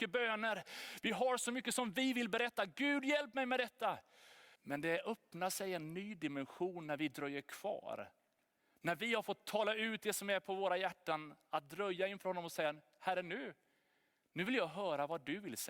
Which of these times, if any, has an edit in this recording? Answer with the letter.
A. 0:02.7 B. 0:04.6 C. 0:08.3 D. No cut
B